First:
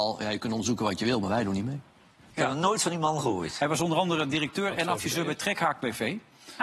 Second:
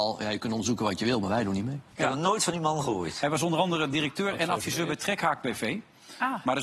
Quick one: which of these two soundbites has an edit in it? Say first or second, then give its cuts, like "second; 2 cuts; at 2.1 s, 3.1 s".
second; 1 cut; at 1.9 s